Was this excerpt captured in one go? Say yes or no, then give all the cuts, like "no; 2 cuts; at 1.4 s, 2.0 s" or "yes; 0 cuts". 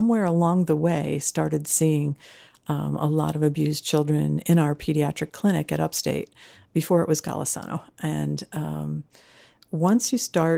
yes; 0 cuts